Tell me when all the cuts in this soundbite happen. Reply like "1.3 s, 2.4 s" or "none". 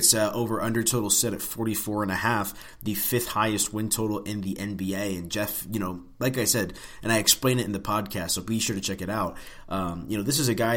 none